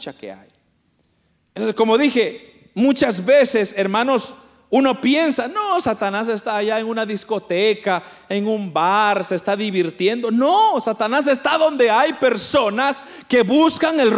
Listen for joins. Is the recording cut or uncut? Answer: uncut